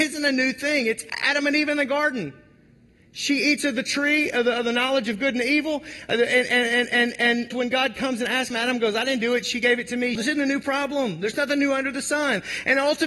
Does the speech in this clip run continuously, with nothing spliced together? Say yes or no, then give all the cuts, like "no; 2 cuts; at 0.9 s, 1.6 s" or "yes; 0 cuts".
no; 3 cuts; at 7.5 s, 8.5 s, 10.2 s